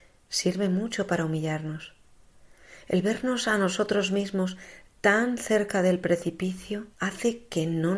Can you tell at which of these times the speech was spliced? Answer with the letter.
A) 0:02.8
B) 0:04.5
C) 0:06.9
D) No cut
C